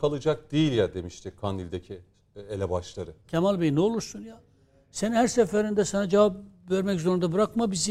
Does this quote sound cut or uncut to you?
cut